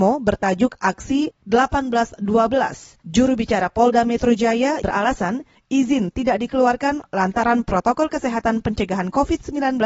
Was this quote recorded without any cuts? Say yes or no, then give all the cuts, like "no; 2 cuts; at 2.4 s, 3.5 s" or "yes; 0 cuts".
no; 2 cuts; at 3.0 s, 4.8 s